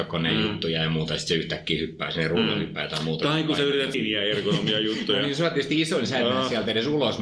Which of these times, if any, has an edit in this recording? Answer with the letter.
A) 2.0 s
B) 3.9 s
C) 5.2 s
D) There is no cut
B